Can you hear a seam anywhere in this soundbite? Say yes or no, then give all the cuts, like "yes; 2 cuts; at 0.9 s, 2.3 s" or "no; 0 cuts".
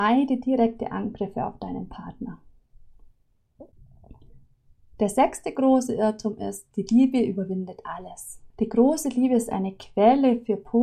yes; 1 cut; at 8.5 s